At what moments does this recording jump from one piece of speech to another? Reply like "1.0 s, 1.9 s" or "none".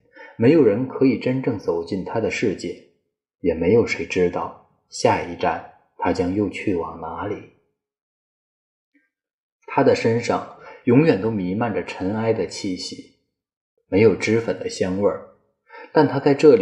9.5 s, 13.8 s